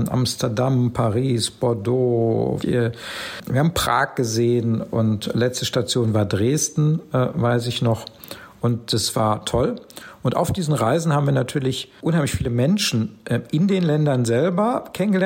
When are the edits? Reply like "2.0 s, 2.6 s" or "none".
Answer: 2.6 s